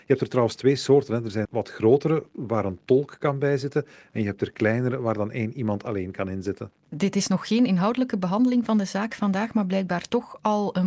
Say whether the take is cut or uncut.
cut